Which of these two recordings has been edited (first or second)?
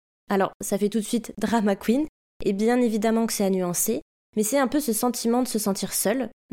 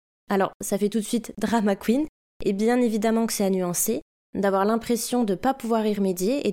second